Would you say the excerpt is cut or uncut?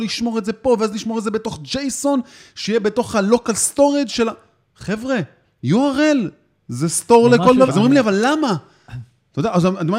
cut